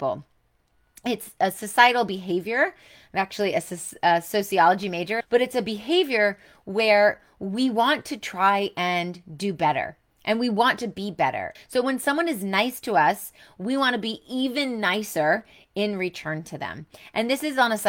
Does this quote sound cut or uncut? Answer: cut